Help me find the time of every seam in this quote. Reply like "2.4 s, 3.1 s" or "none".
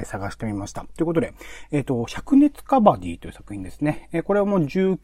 none